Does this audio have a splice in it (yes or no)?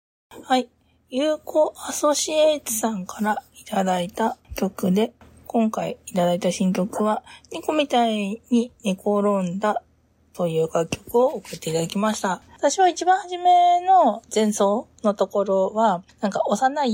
yes